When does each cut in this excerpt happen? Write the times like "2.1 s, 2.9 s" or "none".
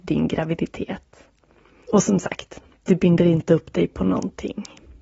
1.8 s